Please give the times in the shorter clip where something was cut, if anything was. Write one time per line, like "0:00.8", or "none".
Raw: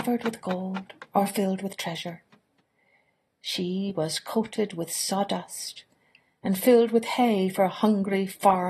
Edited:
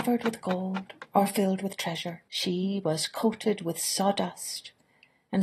0:02.3